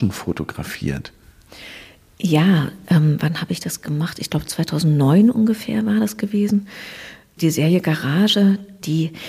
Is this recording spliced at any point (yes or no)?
no